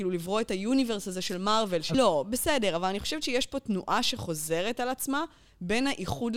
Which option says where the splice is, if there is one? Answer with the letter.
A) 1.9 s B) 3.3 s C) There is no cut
A